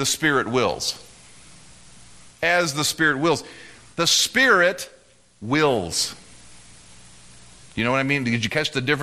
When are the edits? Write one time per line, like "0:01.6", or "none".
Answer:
none